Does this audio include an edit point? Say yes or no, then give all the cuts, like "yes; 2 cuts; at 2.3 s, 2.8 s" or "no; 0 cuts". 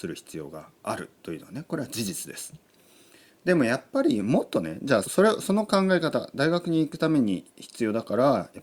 yes; 1 cut; at 5.0 s